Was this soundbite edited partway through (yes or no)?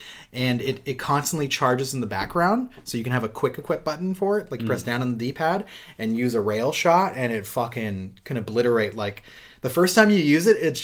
no